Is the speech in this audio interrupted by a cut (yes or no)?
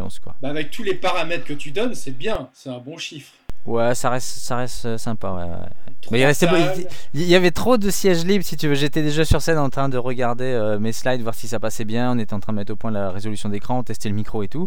no